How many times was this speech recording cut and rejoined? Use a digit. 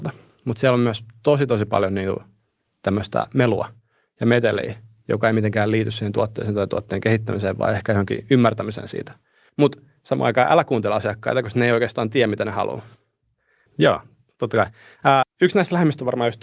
3